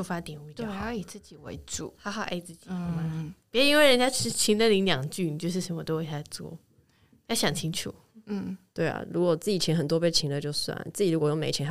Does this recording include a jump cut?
no; 0 cuts

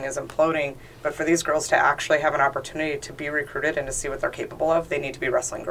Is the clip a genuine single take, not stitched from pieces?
yes; 0 cuts

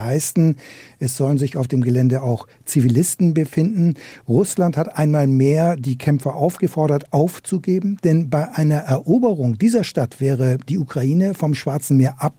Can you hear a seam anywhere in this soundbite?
yes; 1 cut; at 8.0 s

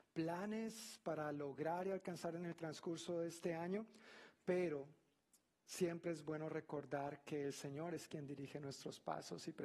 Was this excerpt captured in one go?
yes; 0 cuts

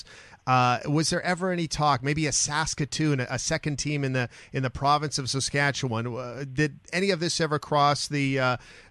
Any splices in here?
no; 0 cuts

